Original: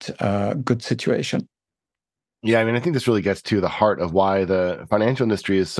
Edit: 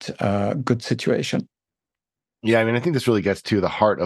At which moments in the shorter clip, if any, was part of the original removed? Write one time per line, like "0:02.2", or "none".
none

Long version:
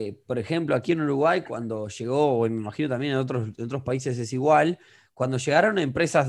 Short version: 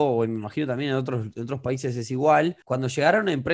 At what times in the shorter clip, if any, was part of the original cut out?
0:02.6

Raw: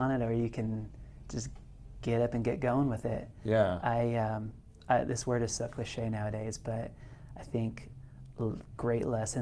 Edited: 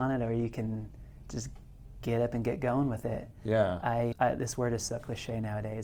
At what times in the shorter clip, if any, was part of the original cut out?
0:04.1

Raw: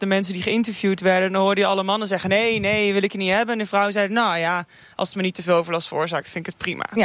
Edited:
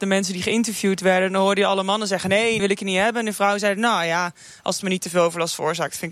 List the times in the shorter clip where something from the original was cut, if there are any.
0:02.6

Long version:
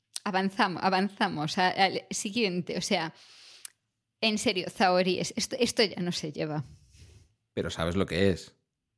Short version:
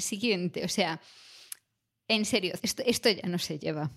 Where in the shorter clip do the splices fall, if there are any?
0:02.6

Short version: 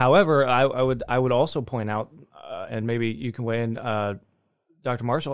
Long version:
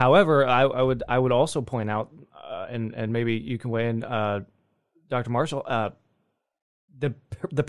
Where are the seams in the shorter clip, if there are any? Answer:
0:02.7

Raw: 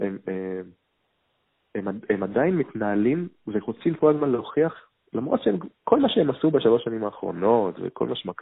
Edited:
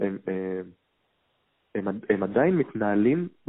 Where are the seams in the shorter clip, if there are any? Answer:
none

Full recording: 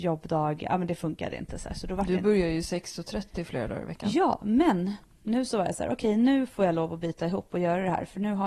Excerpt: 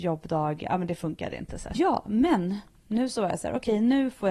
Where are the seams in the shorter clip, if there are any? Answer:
0:01.7

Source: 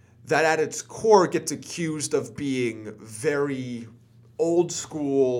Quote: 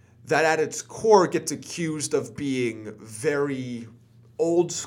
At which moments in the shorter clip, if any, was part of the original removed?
none

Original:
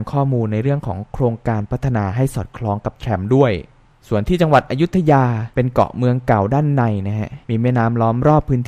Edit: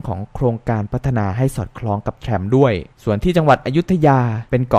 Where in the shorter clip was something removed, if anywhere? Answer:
0:02.9

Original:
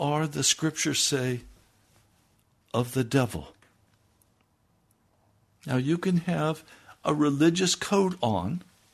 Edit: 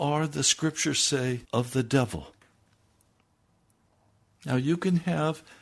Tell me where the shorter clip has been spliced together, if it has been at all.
0:01.4

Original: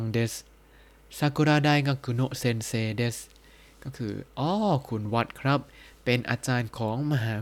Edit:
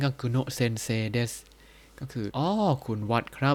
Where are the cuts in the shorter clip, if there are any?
0:02.3

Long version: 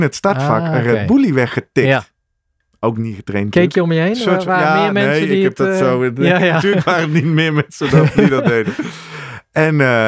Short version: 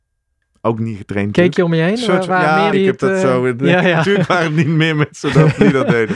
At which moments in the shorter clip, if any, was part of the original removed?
0:02.7

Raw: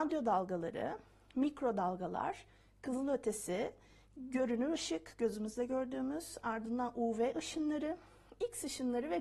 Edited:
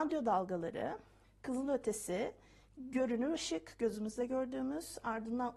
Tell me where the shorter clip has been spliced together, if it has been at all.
0:01.2

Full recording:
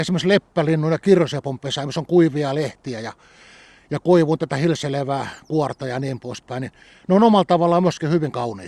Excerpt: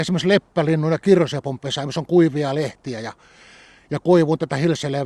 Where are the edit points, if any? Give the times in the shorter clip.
none

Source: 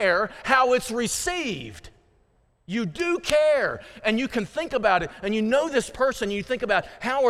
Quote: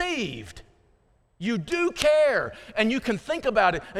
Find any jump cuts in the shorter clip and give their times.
none

